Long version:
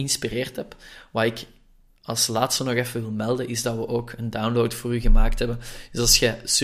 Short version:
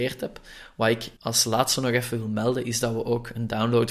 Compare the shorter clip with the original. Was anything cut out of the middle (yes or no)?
yes